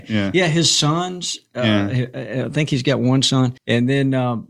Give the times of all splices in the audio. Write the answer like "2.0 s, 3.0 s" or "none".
3.6 s